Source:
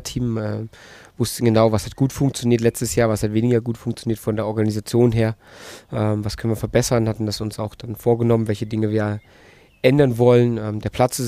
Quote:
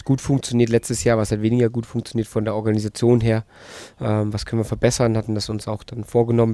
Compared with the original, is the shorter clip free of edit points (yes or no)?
yes